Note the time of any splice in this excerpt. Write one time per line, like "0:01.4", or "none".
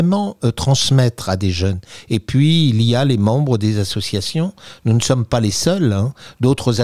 none